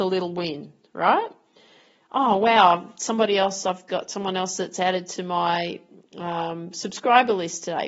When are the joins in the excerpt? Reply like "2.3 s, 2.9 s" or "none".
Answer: none